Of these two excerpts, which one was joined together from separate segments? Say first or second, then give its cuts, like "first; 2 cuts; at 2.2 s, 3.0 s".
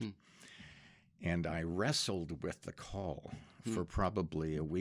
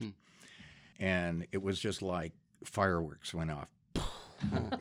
second; 1 cut; at 0.9 s